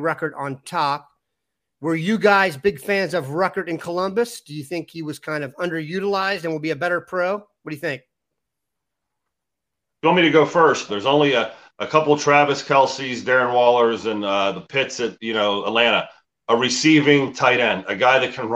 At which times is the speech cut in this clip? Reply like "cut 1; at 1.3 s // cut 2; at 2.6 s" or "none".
cut 1; at 10.9 s